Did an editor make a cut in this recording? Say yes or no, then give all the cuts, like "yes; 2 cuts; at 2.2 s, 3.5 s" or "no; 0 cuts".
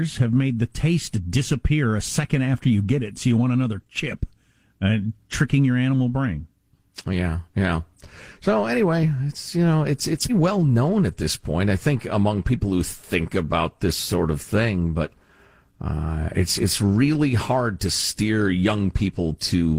yes; 1 cut; at 10.3 s